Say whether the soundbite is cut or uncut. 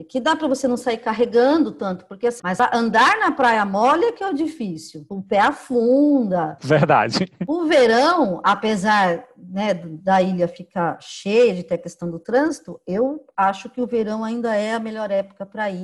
cut